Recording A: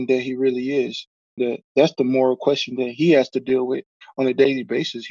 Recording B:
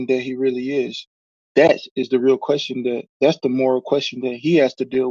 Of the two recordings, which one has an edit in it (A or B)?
A